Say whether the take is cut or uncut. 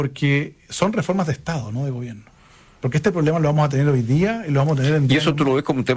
uncut